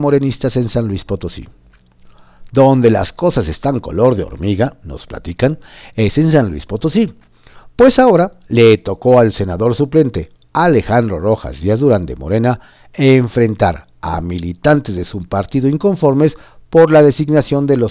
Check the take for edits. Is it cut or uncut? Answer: uncut